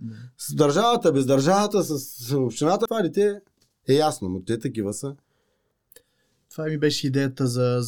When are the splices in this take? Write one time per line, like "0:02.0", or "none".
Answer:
0:02.9